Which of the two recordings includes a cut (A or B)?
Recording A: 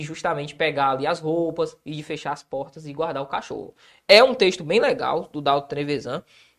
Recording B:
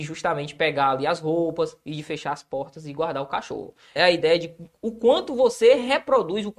B